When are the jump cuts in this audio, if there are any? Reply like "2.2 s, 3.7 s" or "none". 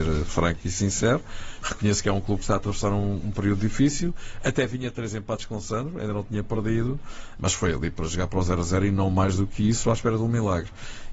none